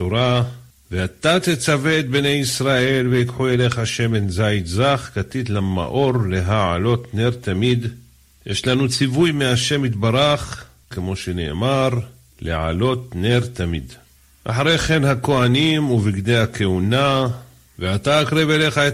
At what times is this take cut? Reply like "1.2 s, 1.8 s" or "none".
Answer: 10.9 s